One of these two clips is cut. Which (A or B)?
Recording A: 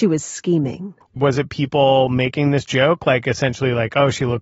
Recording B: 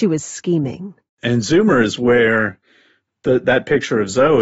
A